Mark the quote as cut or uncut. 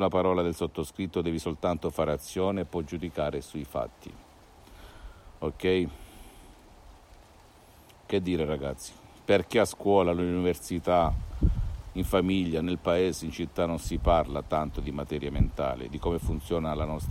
uncut